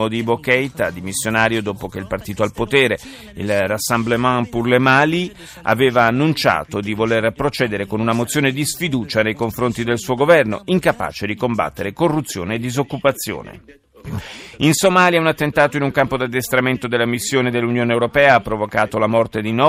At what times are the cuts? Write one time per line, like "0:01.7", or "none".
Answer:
none